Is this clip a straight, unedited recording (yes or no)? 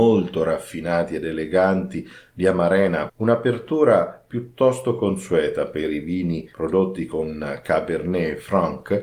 no